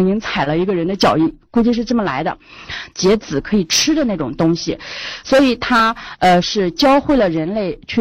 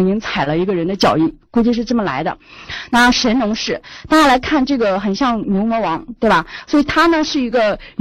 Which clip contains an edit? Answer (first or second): first